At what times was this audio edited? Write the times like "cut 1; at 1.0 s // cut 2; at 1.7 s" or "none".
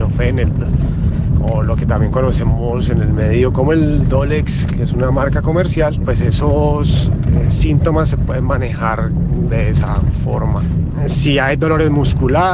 cut 1; at 6.1 s